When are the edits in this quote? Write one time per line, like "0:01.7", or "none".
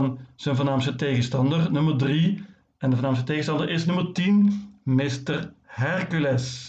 none